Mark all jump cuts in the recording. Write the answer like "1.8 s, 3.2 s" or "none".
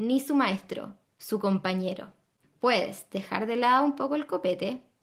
1.0 s, 2.4 s